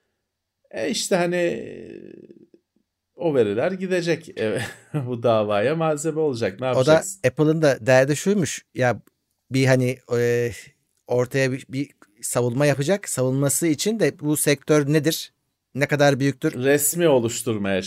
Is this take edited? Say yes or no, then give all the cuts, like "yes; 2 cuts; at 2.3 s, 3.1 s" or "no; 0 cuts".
yes; 1 cut; at 16.5 s